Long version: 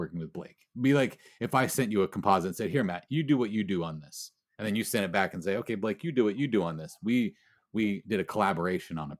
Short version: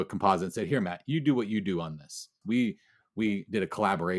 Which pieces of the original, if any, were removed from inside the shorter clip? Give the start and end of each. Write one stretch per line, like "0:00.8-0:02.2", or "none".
0:04.4-0:07.0